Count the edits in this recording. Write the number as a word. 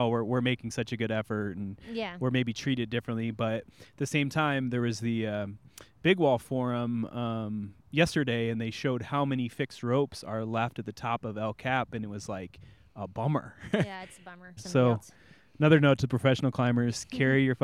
one